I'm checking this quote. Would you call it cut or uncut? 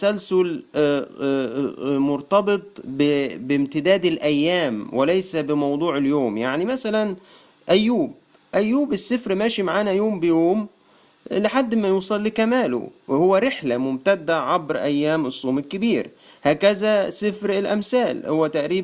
uncut